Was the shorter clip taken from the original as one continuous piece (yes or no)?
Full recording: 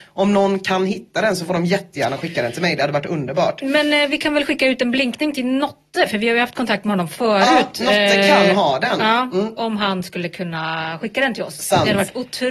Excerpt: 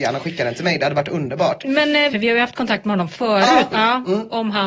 no